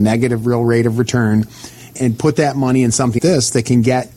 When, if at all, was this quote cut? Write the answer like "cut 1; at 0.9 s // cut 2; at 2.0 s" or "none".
cut 1; at 2.0 s // cut 2; at 3.2 s